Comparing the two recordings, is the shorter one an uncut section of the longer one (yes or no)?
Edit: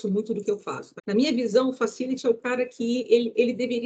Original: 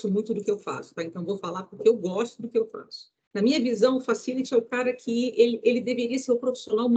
no